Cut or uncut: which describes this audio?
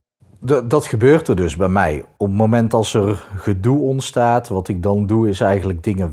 uncut